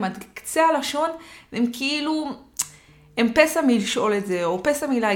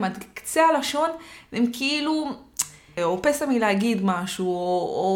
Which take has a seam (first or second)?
second